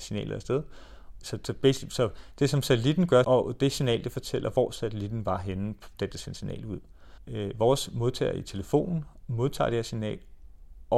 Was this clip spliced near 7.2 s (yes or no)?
no